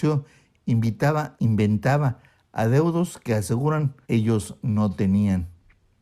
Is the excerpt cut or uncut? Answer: cut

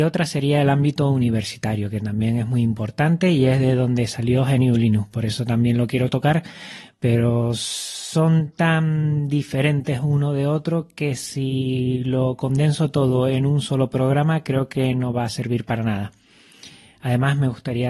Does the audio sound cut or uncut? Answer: uncut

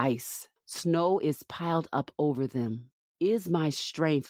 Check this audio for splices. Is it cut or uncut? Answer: cut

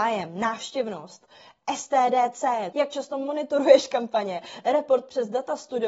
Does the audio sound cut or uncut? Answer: cut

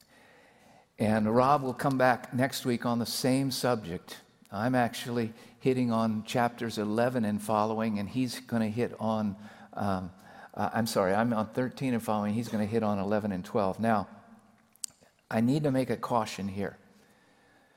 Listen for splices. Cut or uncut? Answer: uncut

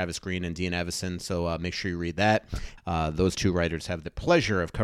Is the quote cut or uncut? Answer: cut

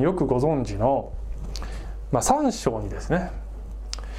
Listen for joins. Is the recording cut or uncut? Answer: uncut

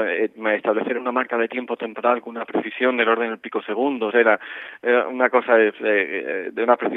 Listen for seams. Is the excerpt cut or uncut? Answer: cut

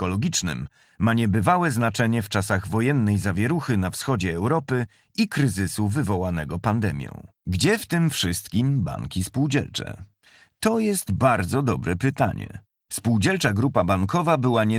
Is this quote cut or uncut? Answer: cut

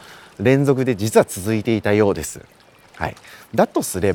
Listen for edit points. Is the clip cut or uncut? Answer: uncut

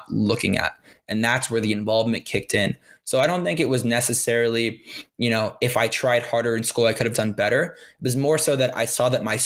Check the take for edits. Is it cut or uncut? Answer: uncut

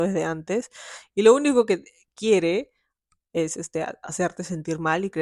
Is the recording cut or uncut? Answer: uncut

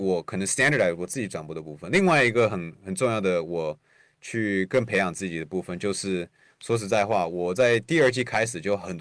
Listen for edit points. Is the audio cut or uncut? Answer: uncut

